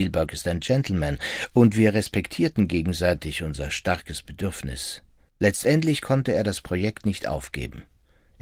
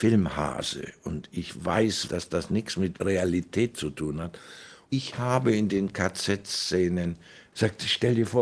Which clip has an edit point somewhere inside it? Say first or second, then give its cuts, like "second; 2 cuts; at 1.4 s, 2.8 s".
second; 1 cut; at 2.1 s